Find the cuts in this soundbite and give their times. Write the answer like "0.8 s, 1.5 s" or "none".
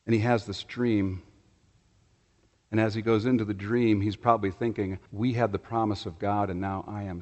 5.1 s